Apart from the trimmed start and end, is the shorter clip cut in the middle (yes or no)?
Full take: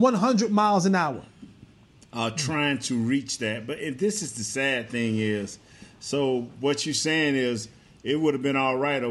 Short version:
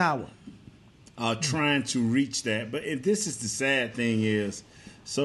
no